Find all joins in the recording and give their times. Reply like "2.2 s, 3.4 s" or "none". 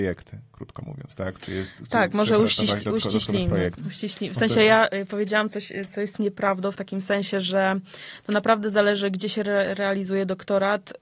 3.8 s